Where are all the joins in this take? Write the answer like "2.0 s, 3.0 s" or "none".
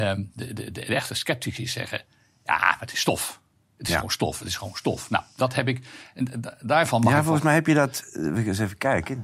none

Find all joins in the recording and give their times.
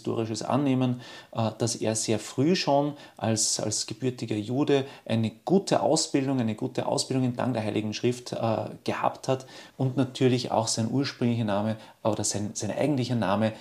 9.7 s

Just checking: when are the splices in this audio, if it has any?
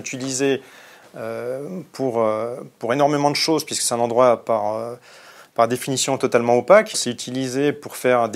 6.9 s

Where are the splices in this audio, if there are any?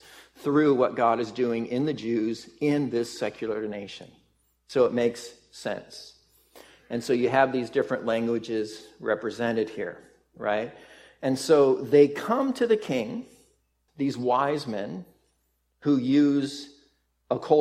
13.9 s

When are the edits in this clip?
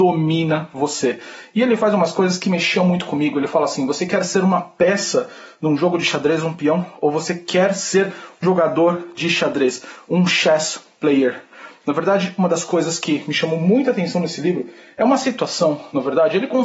8.4 s

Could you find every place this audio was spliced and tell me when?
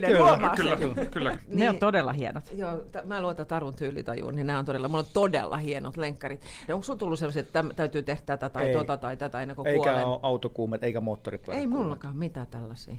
1.3 s, 6.7 s

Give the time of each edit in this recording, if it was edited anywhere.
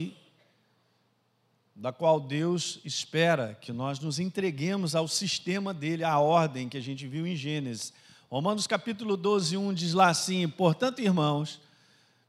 none

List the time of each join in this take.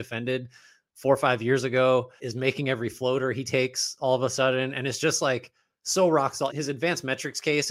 2.2 s, 6.5 s

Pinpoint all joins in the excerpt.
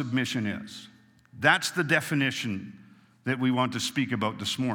none

